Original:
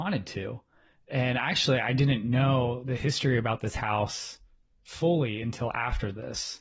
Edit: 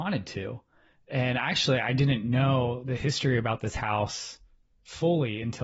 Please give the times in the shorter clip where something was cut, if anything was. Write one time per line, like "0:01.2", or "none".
none